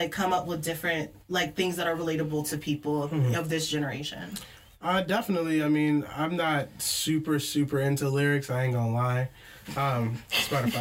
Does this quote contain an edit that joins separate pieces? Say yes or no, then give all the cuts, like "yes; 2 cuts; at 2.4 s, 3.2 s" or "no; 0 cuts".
yes; 2 cuts; at 1.2 s, 9.6 s